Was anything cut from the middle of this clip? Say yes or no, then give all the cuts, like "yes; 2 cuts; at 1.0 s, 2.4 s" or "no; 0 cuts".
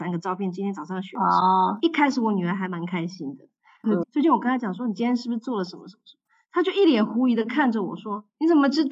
yes; 1 cut; at 4.0 s